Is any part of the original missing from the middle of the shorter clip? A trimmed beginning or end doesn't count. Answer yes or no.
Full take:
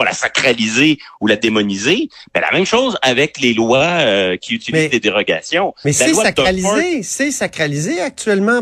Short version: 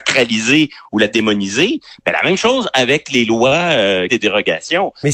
yes